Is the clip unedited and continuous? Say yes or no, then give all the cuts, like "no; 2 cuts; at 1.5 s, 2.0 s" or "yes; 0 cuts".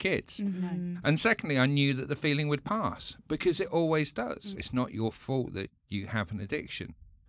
no; 2 cuts; at 4.5 s, 5.8 s